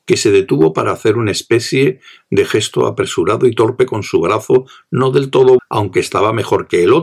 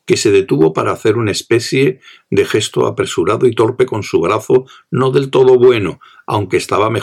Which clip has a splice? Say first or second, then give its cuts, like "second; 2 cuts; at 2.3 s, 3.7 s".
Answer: first; 1 cut; at 5.6 s